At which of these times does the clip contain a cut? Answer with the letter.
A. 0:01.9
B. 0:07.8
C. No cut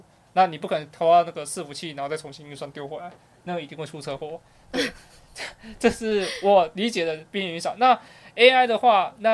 C